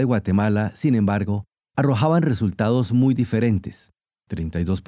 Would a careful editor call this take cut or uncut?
uncut